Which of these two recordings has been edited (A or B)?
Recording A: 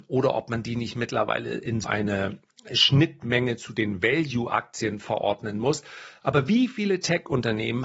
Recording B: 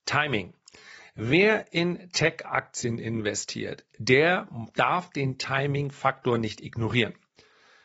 A